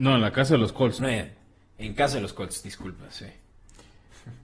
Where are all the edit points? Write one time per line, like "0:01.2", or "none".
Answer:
0:01.0

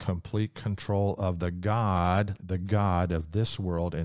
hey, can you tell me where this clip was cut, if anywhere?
0:02.4

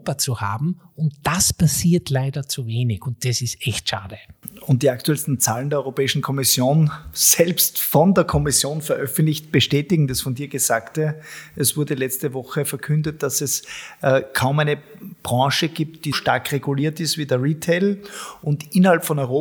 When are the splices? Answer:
0:16.1

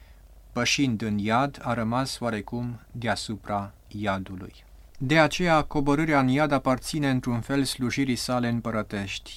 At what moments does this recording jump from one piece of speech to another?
0:04.9

